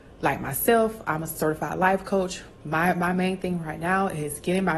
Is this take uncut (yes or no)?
yes